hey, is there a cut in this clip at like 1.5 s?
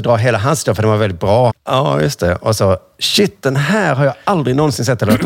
yes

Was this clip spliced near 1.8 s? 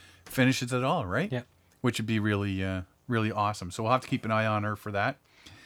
no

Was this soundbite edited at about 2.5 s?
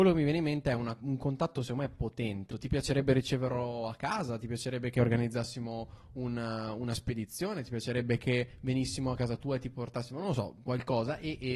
yes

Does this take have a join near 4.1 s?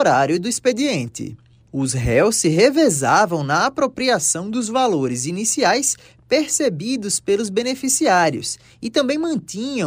no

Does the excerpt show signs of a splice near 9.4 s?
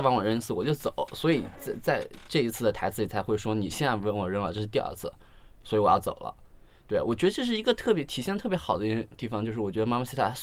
no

